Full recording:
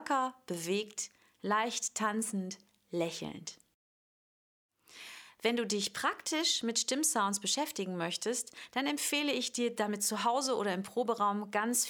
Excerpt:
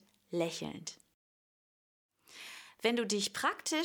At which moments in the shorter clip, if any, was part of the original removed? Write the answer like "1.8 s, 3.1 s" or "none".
none